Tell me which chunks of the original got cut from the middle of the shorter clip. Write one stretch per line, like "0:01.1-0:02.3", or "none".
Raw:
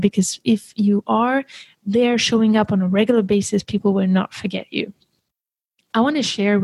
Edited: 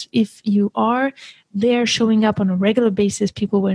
none